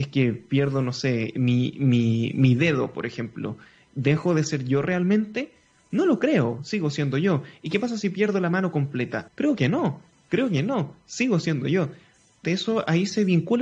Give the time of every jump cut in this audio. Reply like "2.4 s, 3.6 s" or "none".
9.3 s, 12.4 s